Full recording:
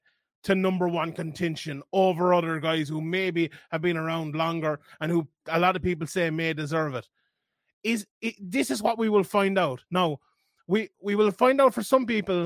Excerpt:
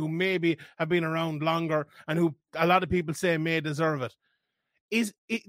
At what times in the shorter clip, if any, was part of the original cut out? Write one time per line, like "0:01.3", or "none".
none